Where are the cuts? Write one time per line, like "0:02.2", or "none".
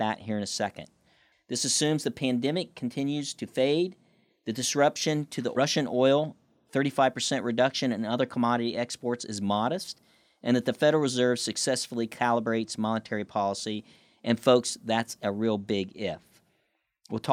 0:01.3

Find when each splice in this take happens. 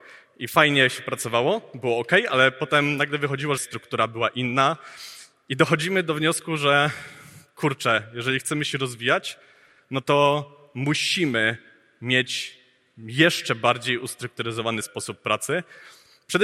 0:03.6
0:14.8

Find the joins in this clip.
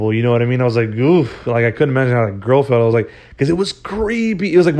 none

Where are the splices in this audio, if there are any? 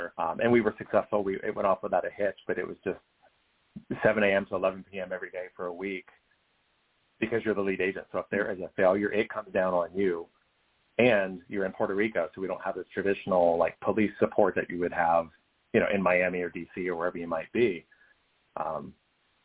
none

